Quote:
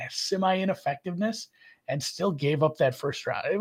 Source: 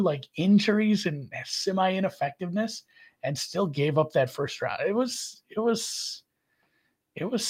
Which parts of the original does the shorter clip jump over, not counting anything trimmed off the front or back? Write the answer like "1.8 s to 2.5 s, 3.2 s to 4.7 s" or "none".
none